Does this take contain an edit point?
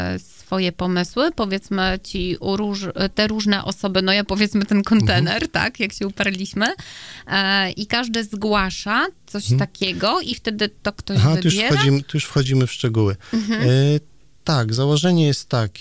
no; 0 cuts

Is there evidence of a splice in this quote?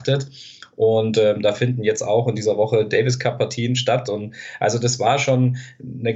no; 0 cuts

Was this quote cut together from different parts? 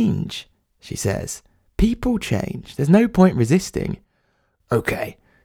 no; 0 cuts

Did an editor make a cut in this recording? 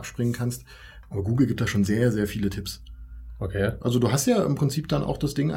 yes; 2 cuts; at 1.0 s, 3.8 s

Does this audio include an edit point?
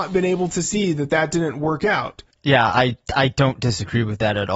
yes; 1 cut; at 2.3 s

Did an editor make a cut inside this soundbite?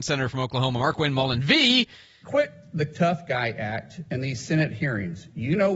yes; 1 cut; at 2.2 s

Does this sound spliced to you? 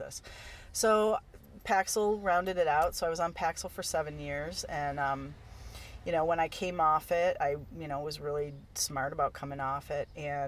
no; 0 cuts

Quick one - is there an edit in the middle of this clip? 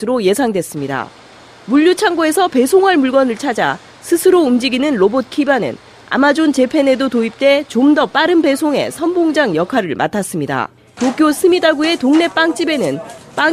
yes; 1 cut; at 11.0 s

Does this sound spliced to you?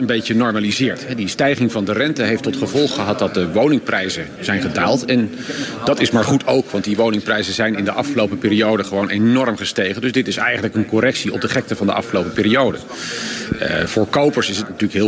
no; 0 cuts

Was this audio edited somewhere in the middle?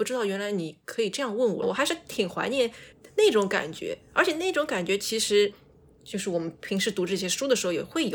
yes; 2 cuts; at 1.6 s, 5.9 s

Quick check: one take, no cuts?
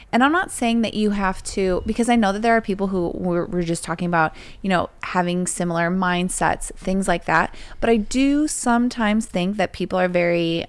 yes; 0 cuts

